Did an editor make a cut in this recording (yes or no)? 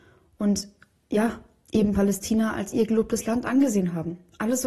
no